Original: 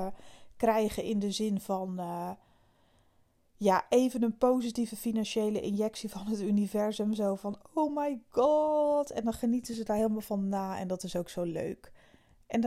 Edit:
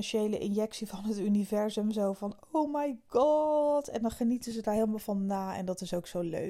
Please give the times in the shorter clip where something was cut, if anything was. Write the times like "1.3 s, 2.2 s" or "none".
none